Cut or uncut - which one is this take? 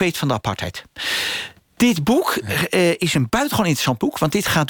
uncut